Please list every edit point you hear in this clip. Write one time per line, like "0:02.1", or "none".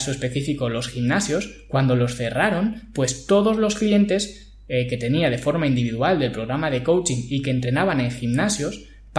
none